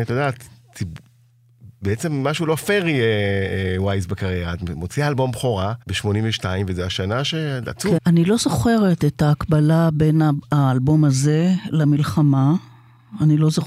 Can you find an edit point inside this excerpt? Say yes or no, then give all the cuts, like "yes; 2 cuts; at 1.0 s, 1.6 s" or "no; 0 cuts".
yes; 2 cuts; at 5.8 s, 8.0 s